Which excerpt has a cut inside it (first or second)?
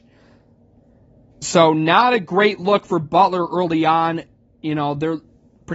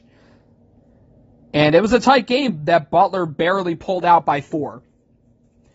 first